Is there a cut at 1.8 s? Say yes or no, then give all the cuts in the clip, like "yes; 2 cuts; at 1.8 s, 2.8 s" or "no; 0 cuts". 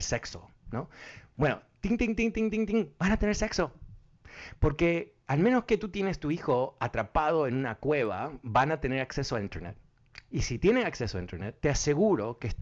no; 0 cuts